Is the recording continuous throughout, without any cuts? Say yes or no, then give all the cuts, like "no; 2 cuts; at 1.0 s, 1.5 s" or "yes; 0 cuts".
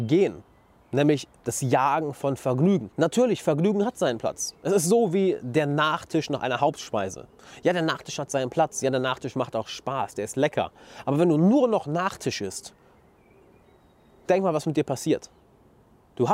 yes; 0 cuts